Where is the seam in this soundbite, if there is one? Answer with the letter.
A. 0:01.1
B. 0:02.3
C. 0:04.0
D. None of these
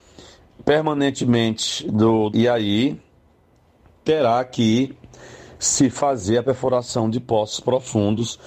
B